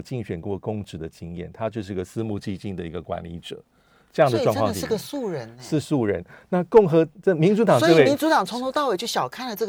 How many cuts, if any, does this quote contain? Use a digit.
0